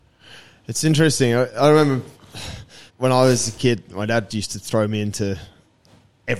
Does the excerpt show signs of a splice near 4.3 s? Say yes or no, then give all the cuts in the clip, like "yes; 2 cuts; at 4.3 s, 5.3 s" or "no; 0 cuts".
yes; 2 cuts; at 2.9 s, 4.3 s